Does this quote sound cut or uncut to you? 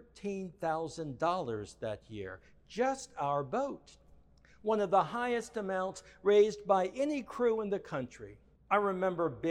cut